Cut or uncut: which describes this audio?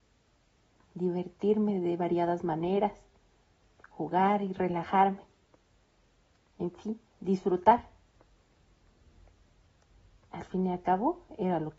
uncut